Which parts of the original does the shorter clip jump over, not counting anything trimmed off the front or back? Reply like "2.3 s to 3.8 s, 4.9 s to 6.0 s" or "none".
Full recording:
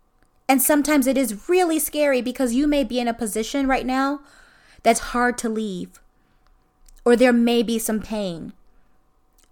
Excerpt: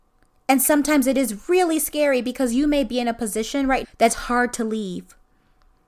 3.8 s to 4.7 s